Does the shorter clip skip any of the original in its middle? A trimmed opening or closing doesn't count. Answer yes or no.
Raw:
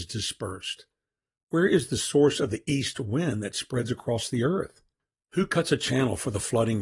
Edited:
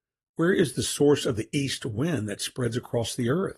no